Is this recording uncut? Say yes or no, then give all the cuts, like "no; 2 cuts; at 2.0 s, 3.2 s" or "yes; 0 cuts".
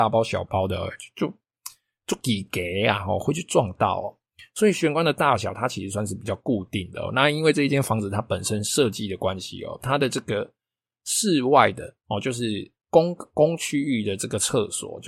yes; 0 cuts